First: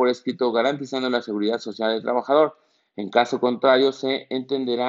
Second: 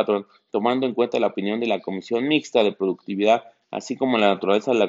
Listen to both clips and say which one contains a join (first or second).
second